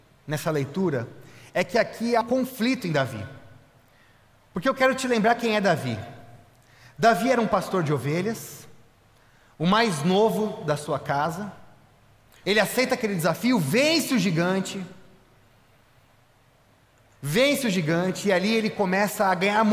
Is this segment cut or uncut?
cut